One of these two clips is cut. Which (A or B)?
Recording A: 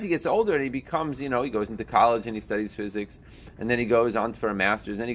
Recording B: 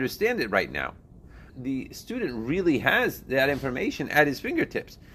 B